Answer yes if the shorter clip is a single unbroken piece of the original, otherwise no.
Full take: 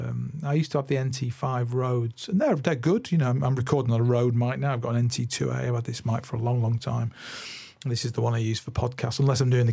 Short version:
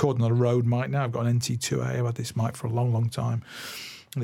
yes